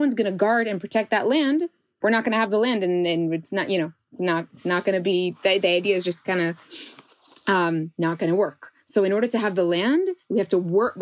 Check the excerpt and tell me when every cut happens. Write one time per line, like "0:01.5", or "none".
0:02.0